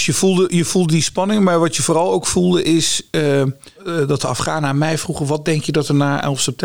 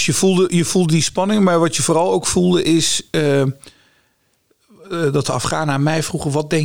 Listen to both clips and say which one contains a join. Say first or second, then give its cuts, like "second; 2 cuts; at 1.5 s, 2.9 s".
first; 1 cut; at 3.8 s